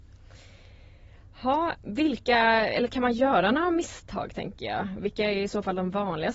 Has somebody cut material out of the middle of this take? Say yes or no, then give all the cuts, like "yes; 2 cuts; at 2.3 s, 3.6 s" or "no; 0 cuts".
yes; 1 cut; at 1.8 s